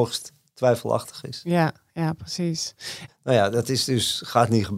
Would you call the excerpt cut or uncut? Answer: cut